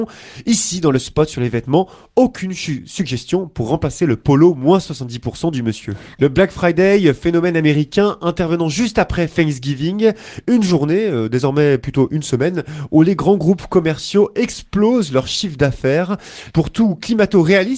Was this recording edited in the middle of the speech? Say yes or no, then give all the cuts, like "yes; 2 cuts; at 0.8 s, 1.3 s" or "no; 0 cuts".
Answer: yes; 2 cuts; at 6.2 s, 16.5 s